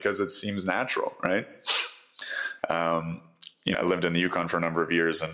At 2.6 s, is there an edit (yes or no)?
yes